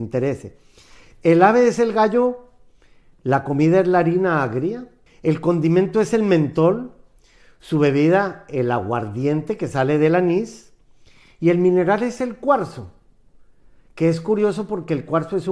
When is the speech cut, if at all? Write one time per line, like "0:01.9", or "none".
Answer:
0:05.1